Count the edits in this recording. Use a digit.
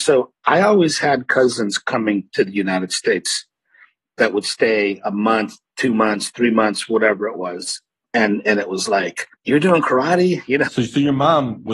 2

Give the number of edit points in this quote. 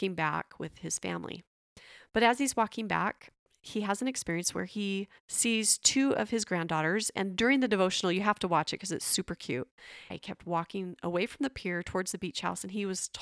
2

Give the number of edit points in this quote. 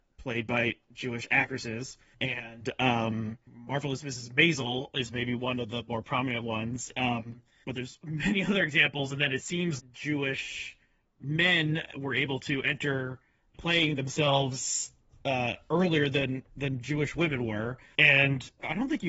3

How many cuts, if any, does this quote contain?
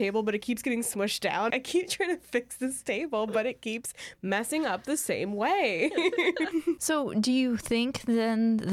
2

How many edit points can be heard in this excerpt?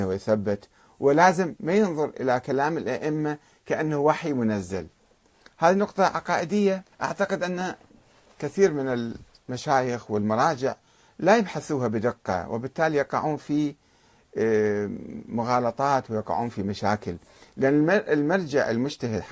1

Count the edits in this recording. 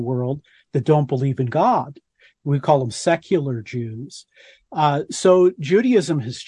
0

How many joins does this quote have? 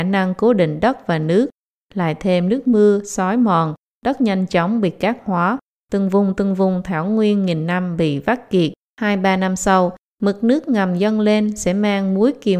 2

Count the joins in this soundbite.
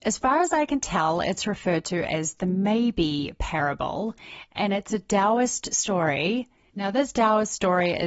1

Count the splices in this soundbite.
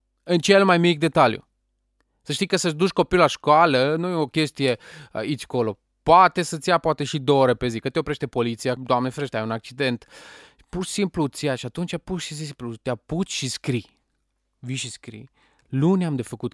1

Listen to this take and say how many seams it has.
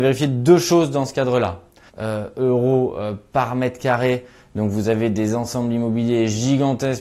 1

